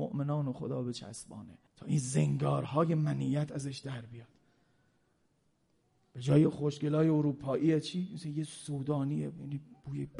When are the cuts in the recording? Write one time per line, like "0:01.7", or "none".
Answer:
0:01.7